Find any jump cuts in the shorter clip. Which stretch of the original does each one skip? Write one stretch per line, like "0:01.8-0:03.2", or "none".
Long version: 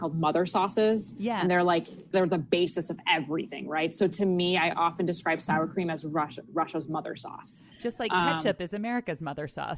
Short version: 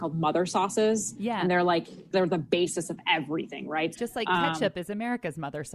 0:03.9-0:07.8